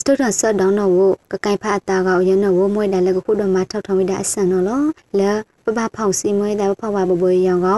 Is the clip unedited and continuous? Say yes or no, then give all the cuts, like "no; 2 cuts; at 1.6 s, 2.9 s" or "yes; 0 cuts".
yes; 0 cuts